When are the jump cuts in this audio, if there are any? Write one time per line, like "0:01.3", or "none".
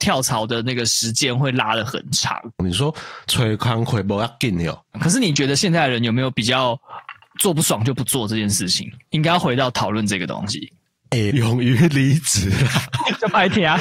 0:04.9
0:11.3